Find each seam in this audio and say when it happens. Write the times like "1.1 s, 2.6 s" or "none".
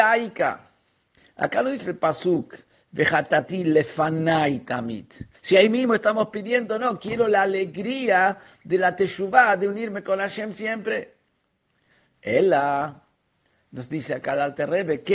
5.3 s